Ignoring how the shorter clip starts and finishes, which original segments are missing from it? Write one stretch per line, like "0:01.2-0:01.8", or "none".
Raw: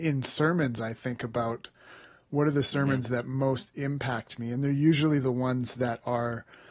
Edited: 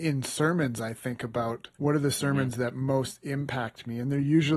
0:01.7-0:02.3